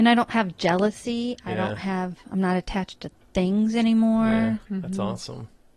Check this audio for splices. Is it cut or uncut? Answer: cut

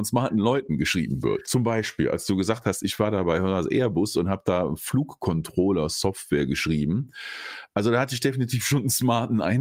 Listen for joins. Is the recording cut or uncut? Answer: cut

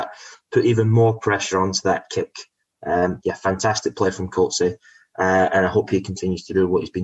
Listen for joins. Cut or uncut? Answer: cut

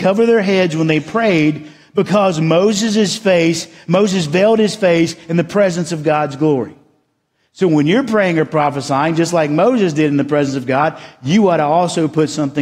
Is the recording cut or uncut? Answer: uncut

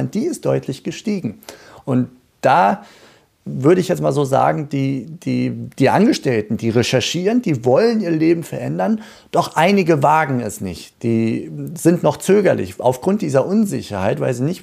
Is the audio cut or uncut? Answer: cut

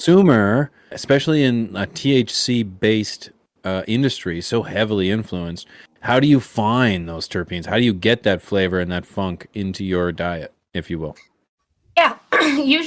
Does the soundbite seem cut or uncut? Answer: cut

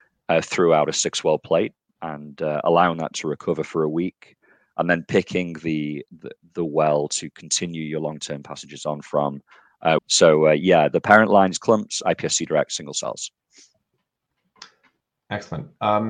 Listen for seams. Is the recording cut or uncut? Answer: cut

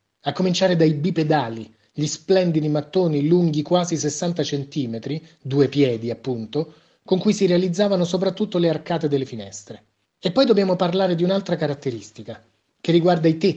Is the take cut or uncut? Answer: uncut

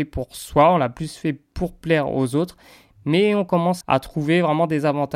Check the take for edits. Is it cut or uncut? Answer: cut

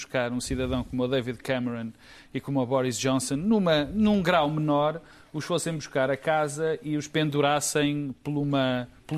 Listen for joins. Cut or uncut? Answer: uncut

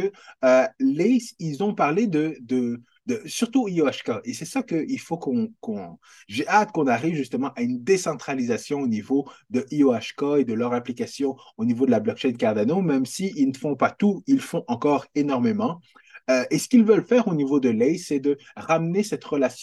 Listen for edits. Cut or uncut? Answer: uncut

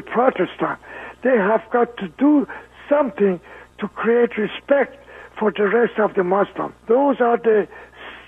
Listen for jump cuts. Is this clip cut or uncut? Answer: cut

